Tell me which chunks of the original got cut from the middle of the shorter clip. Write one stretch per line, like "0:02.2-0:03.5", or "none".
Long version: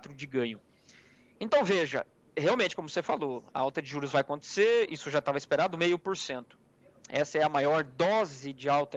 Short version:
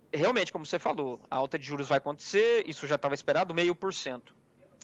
none